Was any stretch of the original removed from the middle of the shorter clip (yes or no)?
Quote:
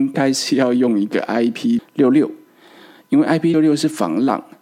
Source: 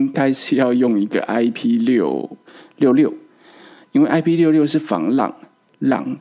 yes